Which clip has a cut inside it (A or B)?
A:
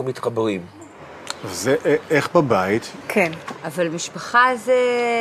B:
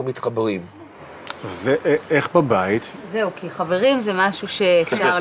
A